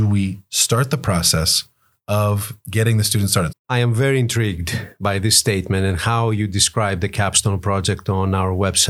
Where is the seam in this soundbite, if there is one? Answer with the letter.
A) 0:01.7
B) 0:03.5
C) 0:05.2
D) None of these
B